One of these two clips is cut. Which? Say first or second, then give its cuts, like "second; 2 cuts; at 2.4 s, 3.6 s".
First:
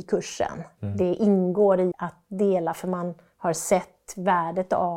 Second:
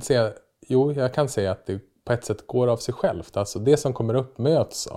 first; 1 cut; at 1.9 s